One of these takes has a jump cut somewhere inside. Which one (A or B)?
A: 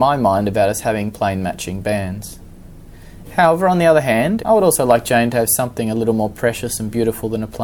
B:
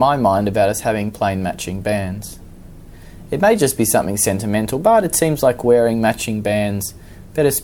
A